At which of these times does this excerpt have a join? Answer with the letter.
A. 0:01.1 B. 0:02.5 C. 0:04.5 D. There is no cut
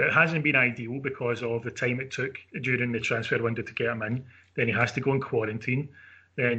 B